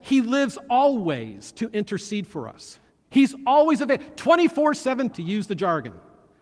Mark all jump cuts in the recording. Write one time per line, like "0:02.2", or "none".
0:05.1